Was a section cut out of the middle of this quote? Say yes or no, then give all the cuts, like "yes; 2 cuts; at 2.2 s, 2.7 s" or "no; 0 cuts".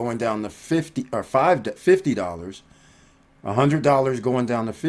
no; 0 cuts